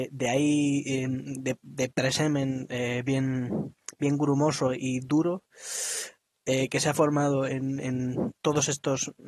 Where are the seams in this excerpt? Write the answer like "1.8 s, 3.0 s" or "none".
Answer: none